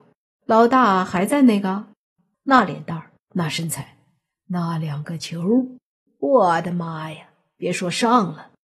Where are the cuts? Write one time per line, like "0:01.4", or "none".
0:02.3